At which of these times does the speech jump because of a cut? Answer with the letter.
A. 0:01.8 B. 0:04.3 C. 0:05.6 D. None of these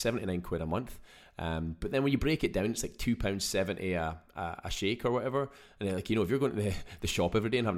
D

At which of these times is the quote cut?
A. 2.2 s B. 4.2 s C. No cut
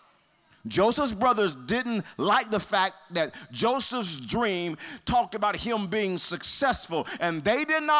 C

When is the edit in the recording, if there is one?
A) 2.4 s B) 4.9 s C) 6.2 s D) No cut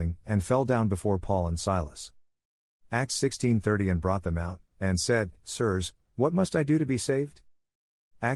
D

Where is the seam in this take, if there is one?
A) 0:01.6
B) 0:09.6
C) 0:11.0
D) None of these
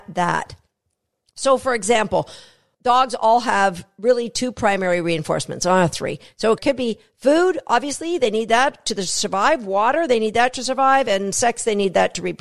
D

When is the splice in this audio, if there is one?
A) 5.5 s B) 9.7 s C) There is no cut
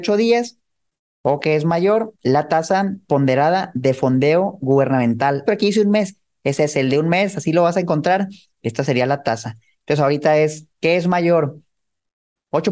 A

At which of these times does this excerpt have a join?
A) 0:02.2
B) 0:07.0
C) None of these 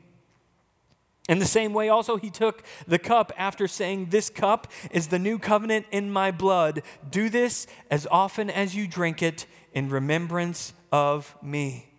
C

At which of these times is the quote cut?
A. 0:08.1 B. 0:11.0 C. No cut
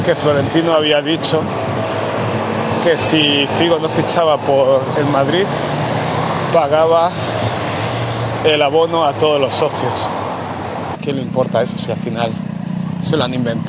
B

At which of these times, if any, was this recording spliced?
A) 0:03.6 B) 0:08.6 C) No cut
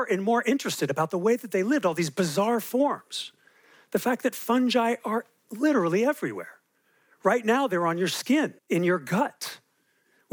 B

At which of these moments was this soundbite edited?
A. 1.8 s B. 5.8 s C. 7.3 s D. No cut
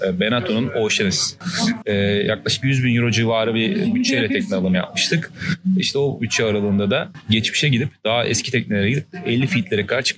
A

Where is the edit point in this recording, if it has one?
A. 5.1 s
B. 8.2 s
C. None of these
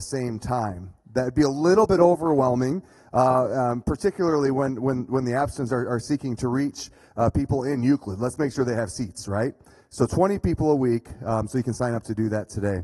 C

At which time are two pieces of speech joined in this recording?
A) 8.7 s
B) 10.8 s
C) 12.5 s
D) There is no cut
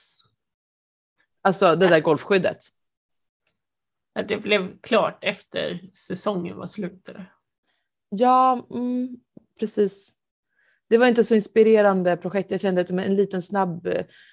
D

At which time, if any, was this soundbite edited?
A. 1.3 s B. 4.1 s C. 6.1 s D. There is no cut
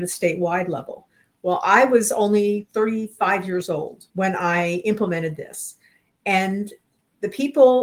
B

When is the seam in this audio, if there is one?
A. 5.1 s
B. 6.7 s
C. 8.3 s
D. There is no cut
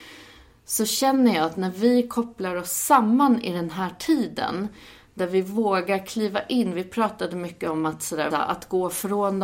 C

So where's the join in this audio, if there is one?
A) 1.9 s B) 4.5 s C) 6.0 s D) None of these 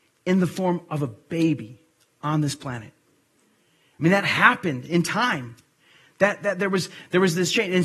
D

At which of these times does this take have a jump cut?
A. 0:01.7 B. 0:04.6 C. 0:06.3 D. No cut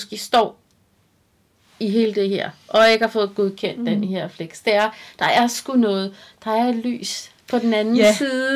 D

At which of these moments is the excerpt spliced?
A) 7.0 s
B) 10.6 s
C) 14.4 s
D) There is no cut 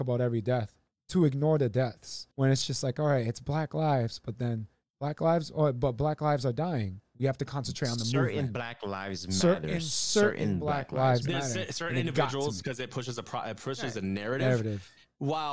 A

